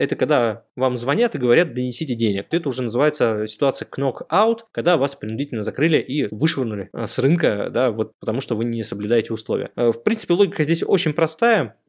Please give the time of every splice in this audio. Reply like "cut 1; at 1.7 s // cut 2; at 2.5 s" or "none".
cut 1; at 2.5 s // cut 2; at 6.3 s